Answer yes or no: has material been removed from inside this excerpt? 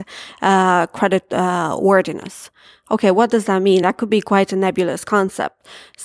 no